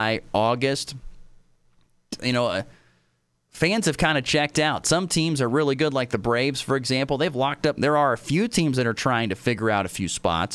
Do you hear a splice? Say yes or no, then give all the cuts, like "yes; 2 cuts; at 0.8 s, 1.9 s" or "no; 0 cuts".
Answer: yes; 1 cut; at 7.8 s